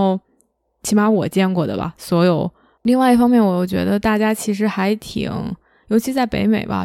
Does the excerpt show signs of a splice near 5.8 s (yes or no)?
no